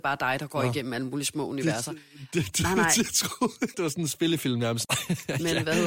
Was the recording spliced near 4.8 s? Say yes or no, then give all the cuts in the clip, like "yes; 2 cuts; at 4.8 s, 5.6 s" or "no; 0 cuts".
yes; 2 cuts; at 3.7 s, 4.8 s